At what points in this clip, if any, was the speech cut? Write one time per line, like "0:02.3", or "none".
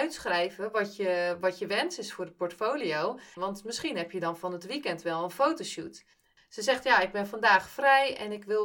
0:03.4
0:06.4